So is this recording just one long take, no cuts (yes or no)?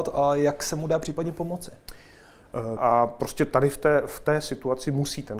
no